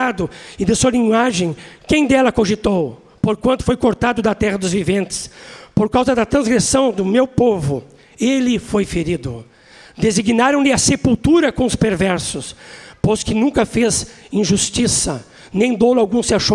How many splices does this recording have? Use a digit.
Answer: 1